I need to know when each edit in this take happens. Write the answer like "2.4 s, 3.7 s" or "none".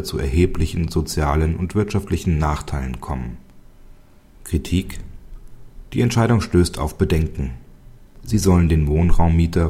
4.3 s, 8.1 s